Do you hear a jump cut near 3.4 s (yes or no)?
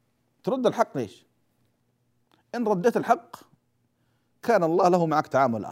no